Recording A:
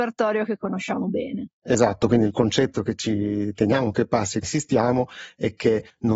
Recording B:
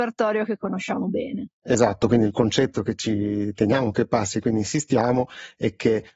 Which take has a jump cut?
A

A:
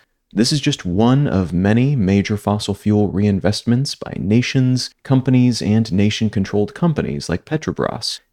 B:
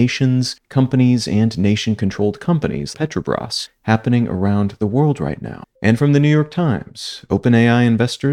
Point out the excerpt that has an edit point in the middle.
B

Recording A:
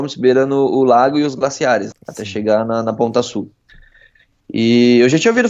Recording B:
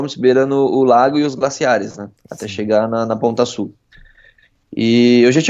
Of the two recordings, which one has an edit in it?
A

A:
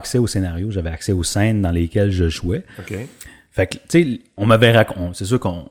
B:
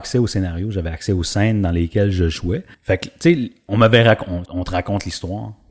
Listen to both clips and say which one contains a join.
B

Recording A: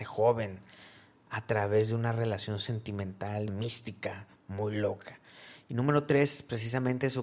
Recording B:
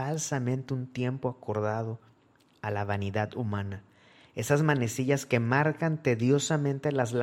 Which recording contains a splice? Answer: A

